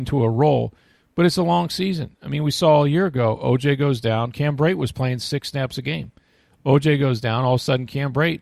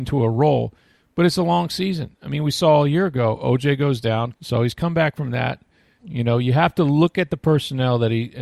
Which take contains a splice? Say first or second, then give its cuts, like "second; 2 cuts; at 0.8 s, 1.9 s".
second; 2 cuts; at 4.3 s, 6.0 s